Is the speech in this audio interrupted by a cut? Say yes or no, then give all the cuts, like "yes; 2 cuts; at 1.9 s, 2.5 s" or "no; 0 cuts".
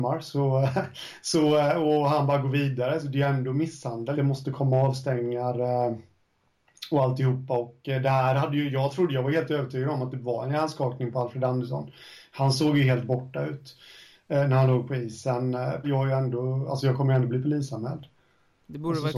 yes; 2 cuts; at 4.1 s, 15.8 s